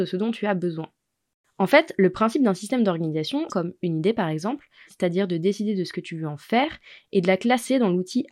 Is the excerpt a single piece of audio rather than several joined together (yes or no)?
no